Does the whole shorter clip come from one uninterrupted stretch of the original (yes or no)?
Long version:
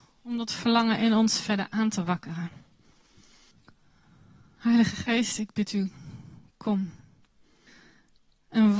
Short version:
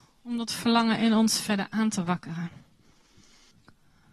yes